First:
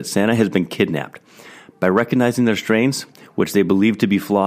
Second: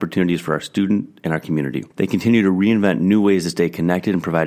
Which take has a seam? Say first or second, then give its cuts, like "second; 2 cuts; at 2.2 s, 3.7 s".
second; 1 cut; at 1.9 s